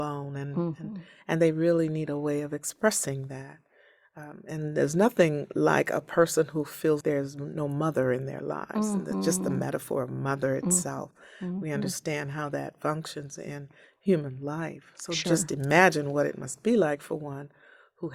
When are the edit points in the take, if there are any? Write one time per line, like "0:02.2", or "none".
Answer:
0:07.0

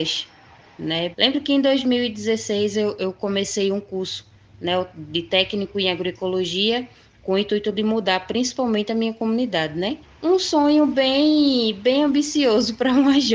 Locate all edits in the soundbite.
0:01.1
0:10.0

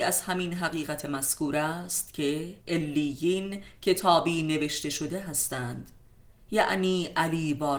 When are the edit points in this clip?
0:02.6

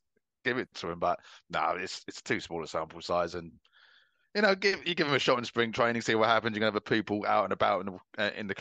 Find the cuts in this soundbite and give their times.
none

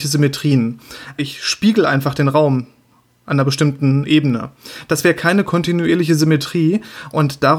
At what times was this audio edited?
0:01.2

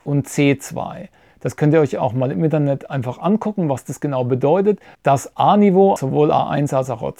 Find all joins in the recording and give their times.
0:04.9
0:06.0

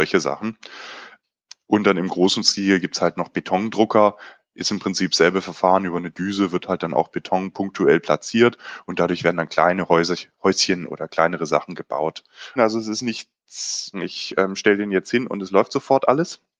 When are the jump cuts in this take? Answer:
0:12.6
0:13.9

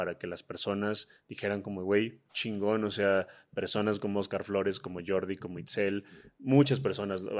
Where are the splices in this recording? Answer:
0:02.3

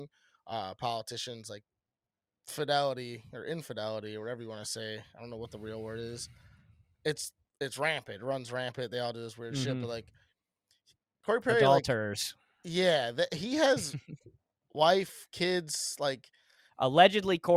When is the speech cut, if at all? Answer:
0:16.7

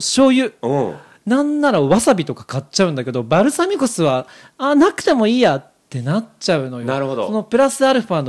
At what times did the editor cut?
none

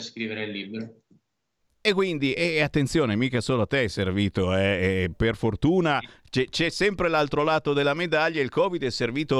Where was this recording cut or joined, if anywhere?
none

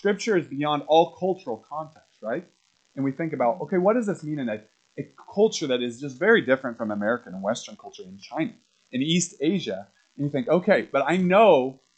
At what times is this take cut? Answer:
0:02.7

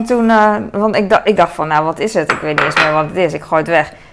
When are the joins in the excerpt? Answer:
0:01.4

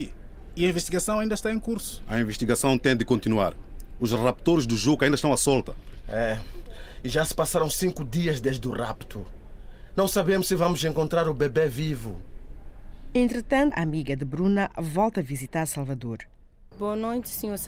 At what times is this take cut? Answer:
0:13.7
0:16.7

